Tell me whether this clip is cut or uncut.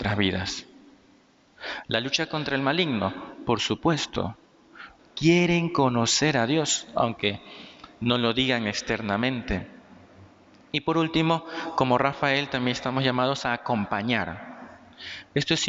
cut